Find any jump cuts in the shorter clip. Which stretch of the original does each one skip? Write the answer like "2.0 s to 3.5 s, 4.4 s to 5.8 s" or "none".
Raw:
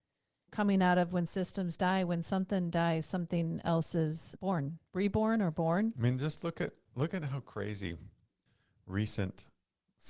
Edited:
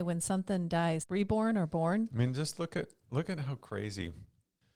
3.0 s to 4.8 s